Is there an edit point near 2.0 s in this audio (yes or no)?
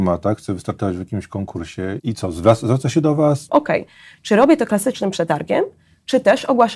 yes